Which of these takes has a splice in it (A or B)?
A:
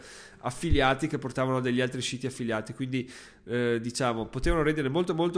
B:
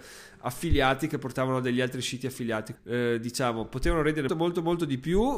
B